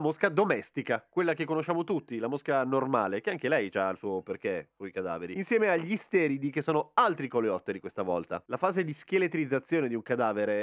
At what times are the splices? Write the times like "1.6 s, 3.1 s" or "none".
8.5 s

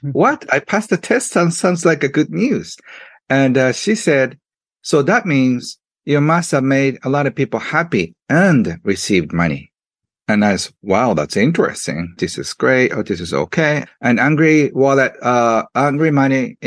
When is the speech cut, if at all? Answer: 12.2 s, 13.9 s

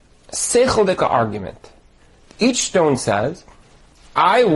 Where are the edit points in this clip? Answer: none

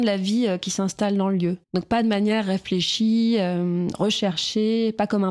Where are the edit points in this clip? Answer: 1.6 s

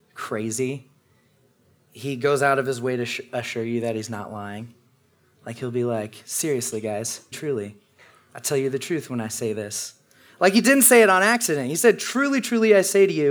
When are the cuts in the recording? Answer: 7.3 s

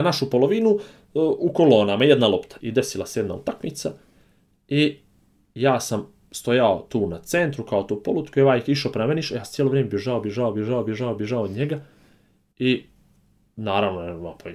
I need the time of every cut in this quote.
2.6 s

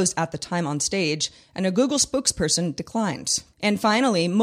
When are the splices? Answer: 3.5 s

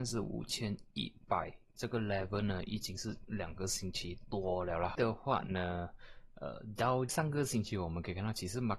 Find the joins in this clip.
4.9 s, 7.1 s

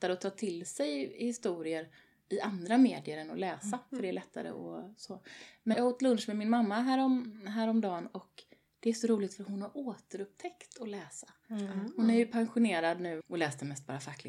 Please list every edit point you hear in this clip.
5.7 s, 13.2 s

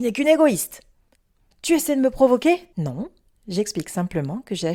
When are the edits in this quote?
1.5 s, 2.7 s

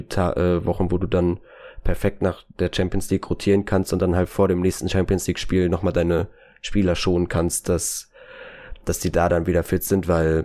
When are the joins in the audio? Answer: none

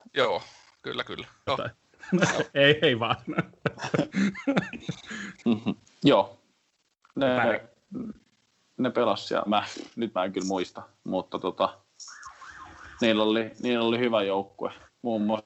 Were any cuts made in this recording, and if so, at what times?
1.5 s, 5.9 s, 9.5 s

